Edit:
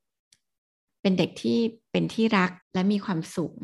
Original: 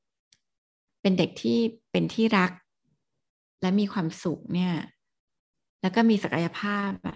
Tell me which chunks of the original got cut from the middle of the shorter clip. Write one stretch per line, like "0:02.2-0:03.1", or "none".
0:02.6-0:03.5